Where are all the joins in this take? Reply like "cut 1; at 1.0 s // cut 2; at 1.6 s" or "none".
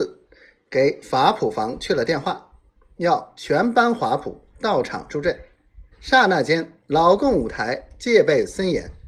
cut 1; at 5.9 s